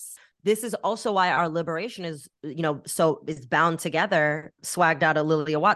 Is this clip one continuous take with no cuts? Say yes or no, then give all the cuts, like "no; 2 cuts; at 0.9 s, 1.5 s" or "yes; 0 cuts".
no; 1 cut; at 4.6 s